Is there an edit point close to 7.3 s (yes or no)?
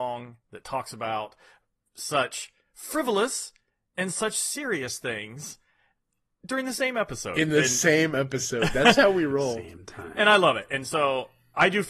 no